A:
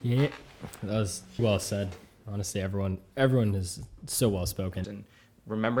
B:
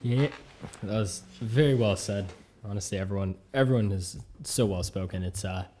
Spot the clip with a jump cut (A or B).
A